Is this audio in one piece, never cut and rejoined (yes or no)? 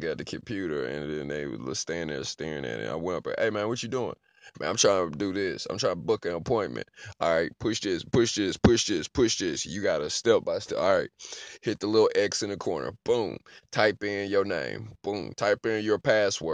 yes